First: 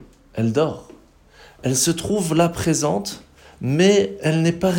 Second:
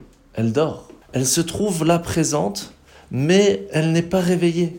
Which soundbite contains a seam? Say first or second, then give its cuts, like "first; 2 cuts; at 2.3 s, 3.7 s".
second; 1 cut; at 1.0 s